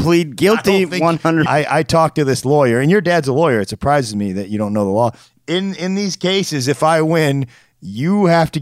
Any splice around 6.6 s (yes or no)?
no